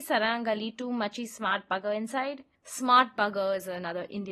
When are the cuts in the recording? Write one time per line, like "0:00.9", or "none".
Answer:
0:02.6